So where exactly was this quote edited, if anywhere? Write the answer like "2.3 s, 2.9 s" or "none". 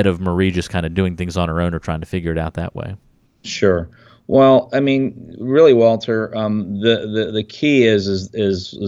none